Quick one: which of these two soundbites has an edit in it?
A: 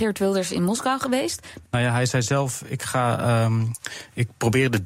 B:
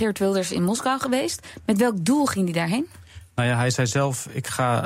A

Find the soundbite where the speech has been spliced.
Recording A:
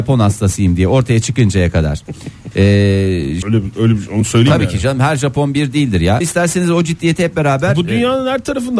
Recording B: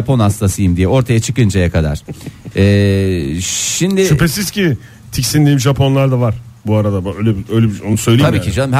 A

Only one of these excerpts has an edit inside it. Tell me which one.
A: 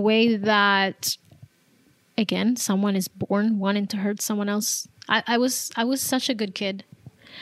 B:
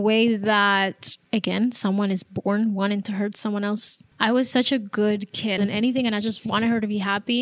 B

